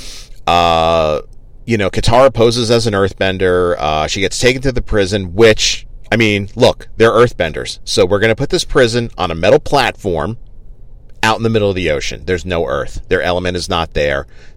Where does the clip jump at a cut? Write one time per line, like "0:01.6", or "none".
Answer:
none